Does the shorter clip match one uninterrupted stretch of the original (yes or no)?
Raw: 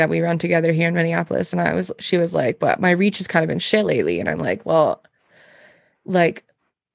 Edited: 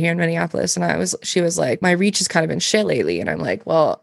no